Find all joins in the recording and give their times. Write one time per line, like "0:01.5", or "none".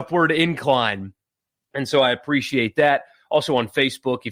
none